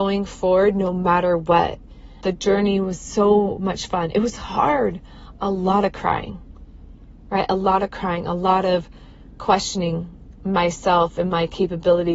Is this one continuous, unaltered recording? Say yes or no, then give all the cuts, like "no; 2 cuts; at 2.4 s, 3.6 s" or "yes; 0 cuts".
no; 1 cut; at 2.2 s